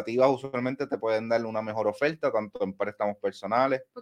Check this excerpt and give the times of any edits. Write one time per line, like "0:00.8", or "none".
none